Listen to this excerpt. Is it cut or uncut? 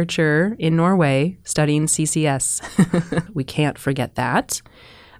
cut